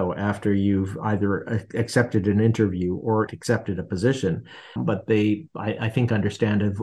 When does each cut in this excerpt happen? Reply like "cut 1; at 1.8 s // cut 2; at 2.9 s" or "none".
cut 1; at 3.3 s // cut 2; at 4.8 s